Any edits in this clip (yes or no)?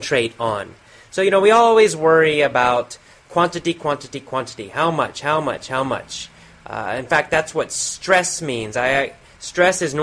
no